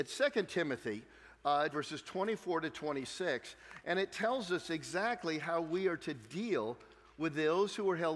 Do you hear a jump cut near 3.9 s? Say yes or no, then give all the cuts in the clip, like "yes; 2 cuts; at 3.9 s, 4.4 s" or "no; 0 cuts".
no; 1 cut; at 1.7 s